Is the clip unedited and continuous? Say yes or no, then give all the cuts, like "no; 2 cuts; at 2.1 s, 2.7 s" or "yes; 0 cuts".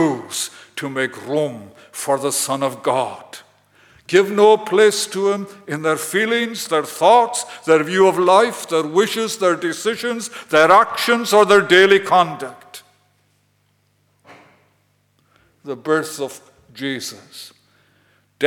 no; 1 cut; at 6.7 s